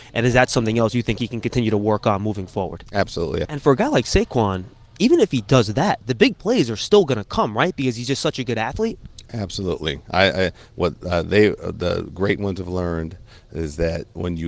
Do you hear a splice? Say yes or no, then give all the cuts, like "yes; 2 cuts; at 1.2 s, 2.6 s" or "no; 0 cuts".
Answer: yes; 1 cut; at 3.4 s